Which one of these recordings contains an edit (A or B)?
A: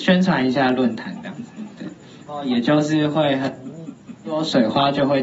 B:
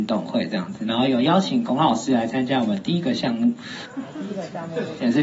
A